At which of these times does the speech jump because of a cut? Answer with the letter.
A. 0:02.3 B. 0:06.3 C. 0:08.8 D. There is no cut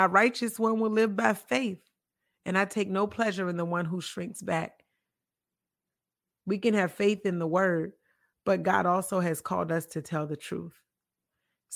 B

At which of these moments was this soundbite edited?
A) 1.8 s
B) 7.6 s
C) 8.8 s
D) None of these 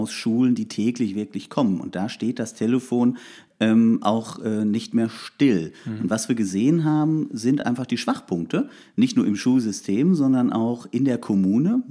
D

